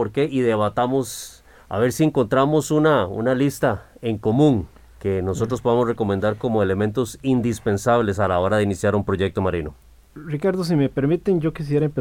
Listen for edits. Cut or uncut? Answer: uncut